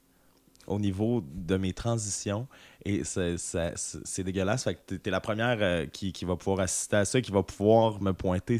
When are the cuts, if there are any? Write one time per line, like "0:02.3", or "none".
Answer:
none